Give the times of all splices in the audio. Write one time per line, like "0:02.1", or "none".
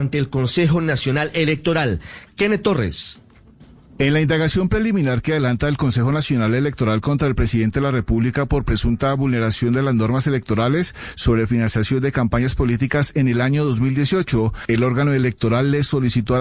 0:02.3